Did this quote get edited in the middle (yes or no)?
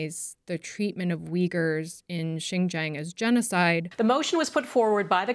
yes